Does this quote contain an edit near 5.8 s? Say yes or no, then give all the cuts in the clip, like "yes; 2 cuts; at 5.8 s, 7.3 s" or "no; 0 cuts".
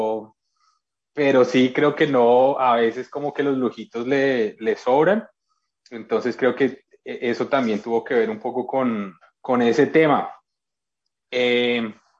no; 2 cuts; at 4.6 s, 9.2 s